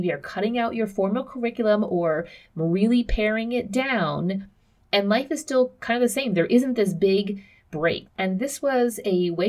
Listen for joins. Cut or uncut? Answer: cut